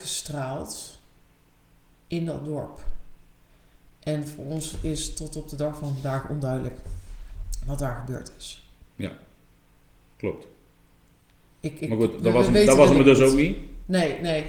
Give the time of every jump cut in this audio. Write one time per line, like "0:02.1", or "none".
0:08.9